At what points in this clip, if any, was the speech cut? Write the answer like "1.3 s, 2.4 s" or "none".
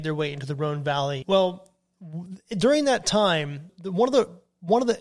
1.2 s, 3.7 s